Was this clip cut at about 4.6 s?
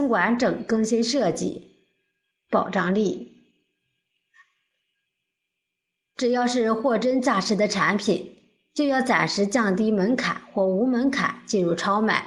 no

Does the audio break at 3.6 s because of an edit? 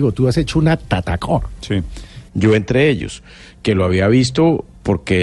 no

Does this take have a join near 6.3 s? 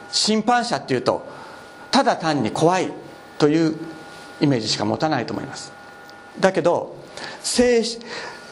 yes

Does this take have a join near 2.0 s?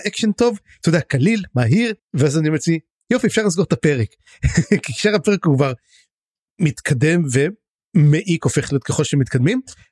yes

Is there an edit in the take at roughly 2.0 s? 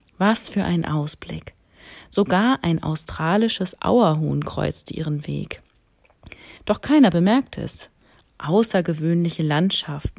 no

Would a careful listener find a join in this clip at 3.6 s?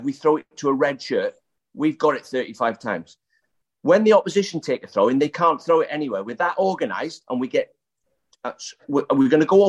no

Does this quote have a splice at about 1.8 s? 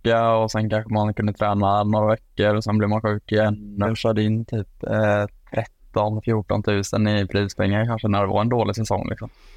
no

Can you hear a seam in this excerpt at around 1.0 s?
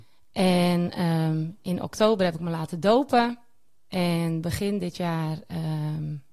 no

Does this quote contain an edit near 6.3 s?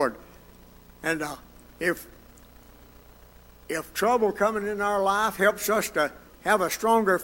yes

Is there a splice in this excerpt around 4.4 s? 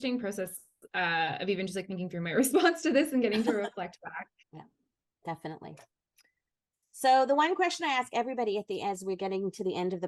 yes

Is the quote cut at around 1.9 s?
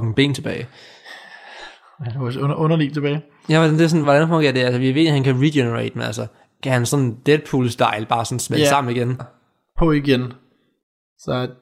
no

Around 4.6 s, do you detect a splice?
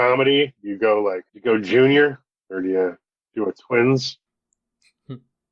no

